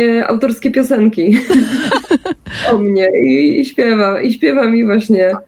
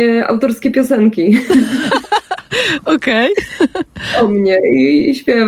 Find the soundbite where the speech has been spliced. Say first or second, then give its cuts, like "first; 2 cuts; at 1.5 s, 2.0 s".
first; 1 cut; at 2.1 s